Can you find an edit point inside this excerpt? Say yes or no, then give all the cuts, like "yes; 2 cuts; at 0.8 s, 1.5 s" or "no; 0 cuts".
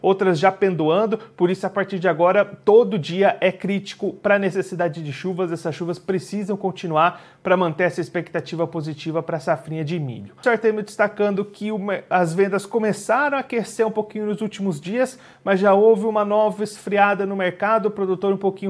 yes; 1 cut; at 10.4 s